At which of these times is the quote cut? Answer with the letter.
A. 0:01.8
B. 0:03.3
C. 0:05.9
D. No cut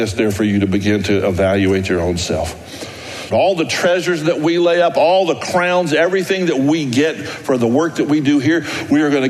B